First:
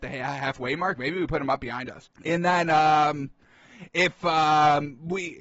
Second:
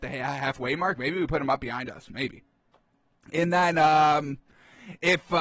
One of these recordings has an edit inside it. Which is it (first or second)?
first